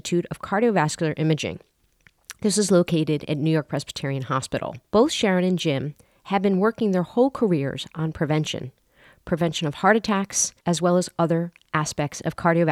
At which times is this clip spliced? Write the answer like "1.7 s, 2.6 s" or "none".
4.9 s, 10.6 s